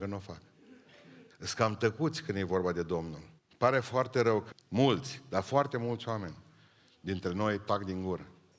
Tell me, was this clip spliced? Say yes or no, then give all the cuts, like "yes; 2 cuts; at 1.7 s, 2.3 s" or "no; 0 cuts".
yes; 3 cuts; at 1.3 s, 3.4 s, 4.5 s